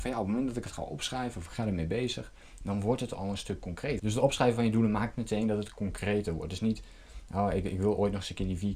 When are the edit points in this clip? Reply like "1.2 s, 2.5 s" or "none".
4.0 s